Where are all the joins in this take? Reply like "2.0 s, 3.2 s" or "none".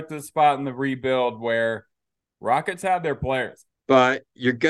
3.7 s